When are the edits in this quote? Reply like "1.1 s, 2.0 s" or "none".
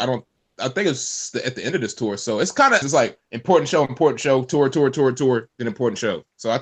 2.8 s